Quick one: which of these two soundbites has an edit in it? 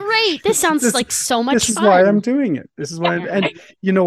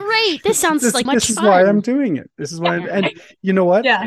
second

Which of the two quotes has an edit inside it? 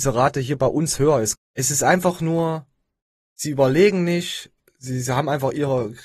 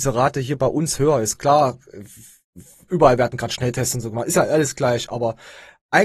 first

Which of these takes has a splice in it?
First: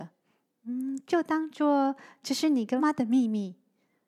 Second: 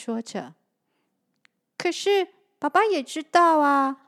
first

